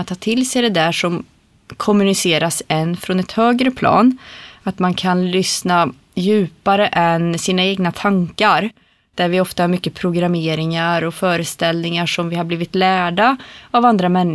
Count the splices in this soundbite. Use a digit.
0